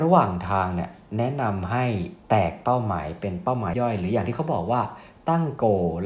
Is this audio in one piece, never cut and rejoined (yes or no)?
no